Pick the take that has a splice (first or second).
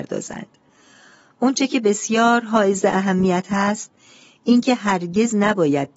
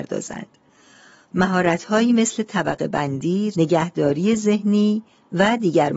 second